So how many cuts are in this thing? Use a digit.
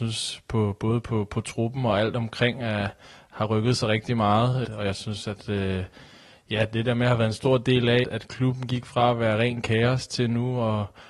2